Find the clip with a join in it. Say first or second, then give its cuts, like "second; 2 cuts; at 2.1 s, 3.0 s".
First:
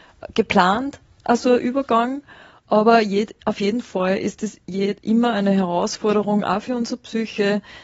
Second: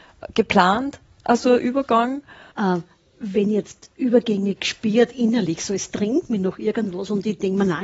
second; 1 cut; at 2.5 s